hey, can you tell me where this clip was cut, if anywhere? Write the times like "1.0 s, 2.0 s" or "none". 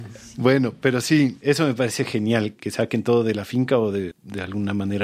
4.1 s

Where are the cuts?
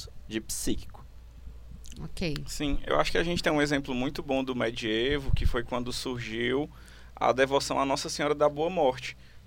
none

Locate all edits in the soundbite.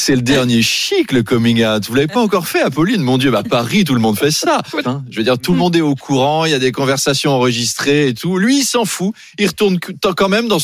4.8 s

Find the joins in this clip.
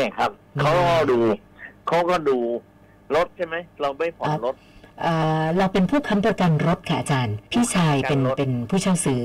7.5 s

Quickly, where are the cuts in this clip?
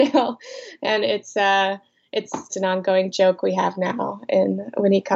2.5 s

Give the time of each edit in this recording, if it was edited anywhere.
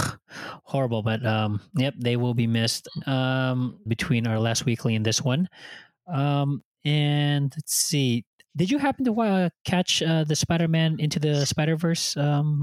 3.9 s

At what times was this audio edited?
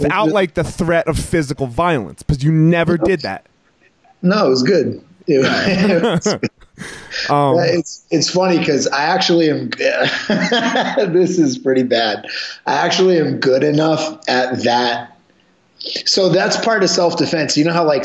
none

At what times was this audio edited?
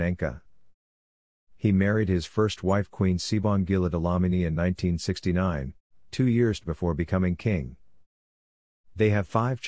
none

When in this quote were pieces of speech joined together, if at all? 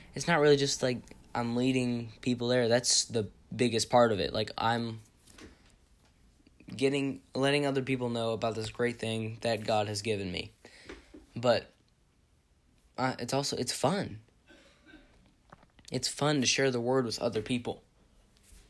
none

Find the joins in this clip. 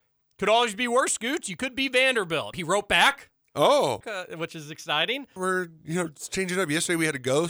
2.5 s, 4.0 s, 5.4 s

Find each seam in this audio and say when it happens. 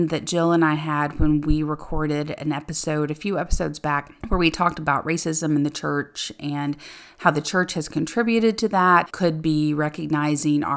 4.2 s, 9.1 s

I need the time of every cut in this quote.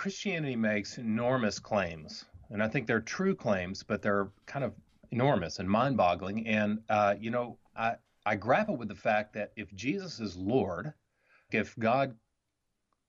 7.7 s, 11.5 s

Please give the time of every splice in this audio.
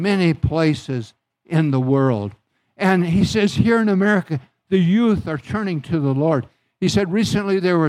none

